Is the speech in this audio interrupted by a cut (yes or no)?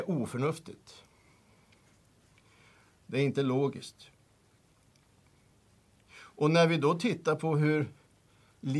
no